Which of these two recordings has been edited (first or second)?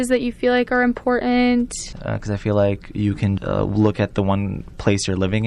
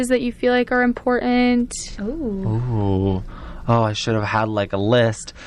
first